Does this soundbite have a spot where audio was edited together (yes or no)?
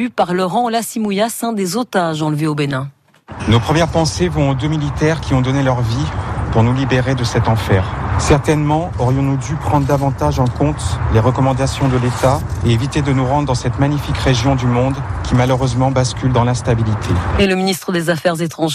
no